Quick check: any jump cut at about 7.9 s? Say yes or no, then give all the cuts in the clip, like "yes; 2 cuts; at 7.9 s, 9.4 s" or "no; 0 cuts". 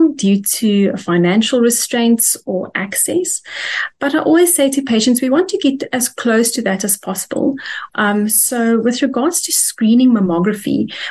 yes; 1 cut; at 7.9 s